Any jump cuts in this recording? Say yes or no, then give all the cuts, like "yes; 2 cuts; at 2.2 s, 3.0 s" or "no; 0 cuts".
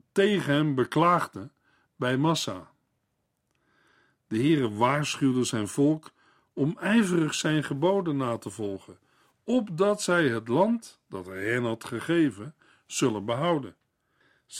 no; 0 cuts